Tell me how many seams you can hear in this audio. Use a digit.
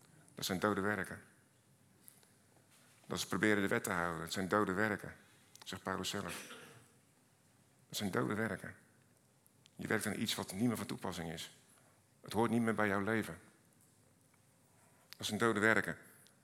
0